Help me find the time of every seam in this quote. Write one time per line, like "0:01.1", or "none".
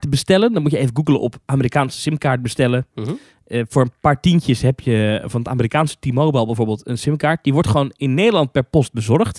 none